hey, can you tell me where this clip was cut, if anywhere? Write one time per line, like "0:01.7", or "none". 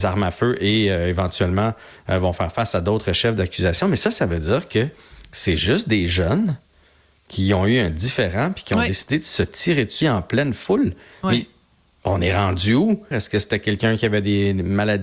0:10.0
0:13.1